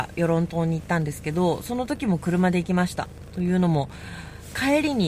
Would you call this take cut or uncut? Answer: uncut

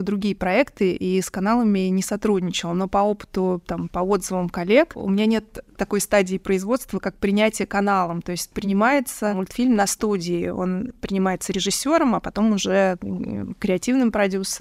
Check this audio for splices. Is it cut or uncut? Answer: uncut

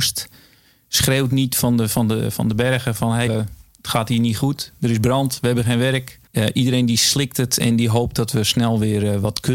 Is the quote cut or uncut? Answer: cut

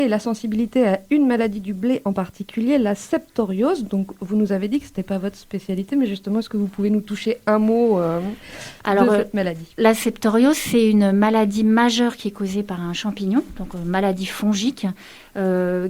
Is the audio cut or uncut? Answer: uncut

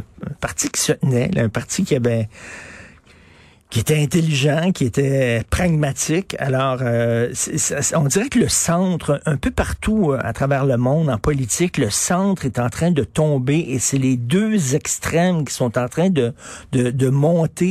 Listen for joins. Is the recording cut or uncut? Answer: uncut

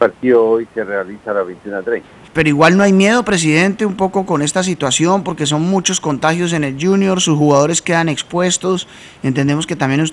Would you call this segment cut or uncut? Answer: cut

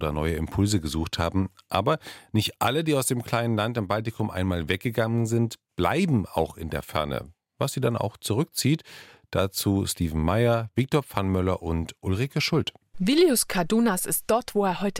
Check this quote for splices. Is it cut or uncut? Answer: uncut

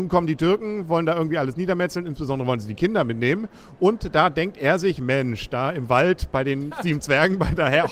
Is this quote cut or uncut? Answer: uncut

